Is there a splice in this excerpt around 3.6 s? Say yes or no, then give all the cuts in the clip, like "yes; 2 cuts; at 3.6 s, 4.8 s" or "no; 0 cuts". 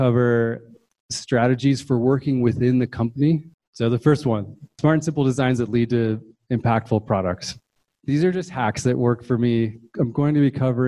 yes; 1 cut; at 3.6 s